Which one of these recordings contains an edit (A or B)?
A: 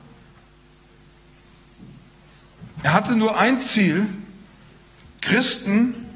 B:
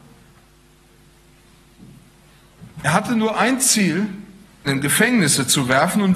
B